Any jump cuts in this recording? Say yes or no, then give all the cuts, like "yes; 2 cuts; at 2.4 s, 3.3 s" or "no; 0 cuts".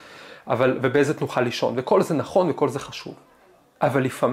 no; 0 cuts